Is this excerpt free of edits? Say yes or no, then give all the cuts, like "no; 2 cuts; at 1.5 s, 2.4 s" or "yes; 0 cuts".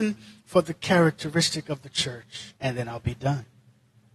no; 1 cut; at 2.6 s